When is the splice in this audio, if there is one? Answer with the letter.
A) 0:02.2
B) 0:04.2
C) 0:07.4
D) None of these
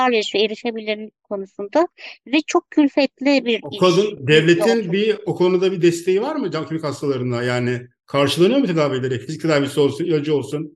D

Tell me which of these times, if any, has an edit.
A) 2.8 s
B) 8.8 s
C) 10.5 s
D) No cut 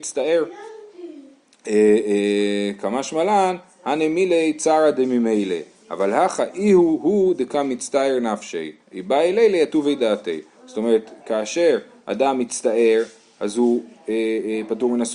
B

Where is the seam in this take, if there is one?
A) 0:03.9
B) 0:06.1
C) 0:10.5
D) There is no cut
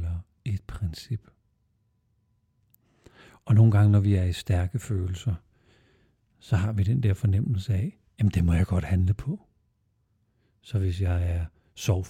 D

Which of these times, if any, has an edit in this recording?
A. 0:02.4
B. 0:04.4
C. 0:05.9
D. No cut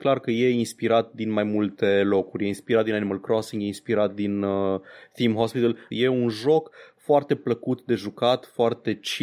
C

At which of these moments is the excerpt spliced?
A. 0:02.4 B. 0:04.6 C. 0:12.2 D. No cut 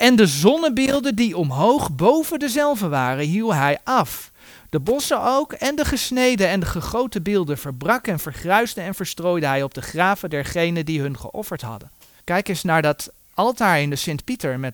C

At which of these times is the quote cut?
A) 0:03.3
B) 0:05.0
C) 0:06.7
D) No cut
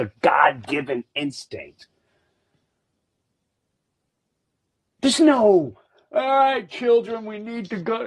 D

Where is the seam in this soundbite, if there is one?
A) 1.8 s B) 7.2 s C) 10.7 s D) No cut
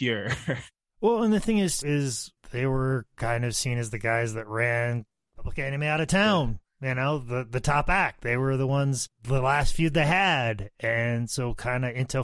A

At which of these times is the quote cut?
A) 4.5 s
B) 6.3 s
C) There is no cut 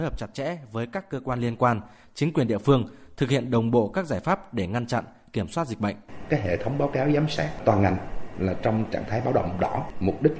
C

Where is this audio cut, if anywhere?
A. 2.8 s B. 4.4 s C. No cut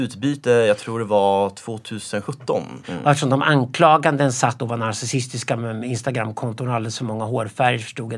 A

